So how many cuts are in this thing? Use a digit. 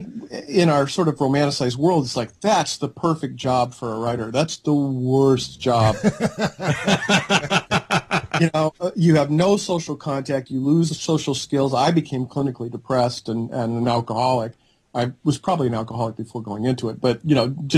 0